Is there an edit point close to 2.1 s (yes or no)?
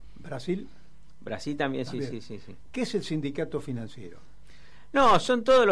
no